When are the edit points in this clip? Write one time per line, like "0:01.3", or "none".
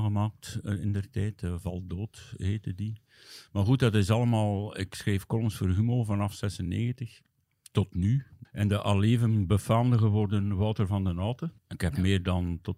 0:08.4
0:11.6